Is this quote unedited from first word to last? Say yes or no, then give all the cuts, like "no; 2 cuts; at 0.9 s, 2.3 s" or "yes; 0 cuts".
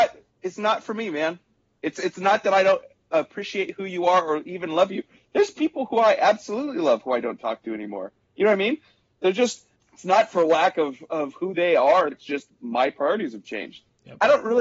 no; 1 cut; at 12.1 s